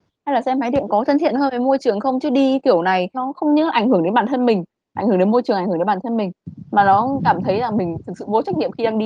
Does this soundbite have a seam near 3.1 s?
yes; 1 cut; at 3.1 s

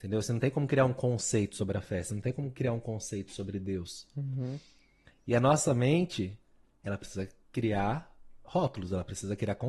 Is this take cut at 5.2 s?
no; 1 cut; at 6.7 s

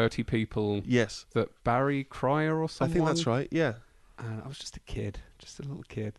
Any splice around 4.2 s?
yes; 1 cut; at 4.2 s

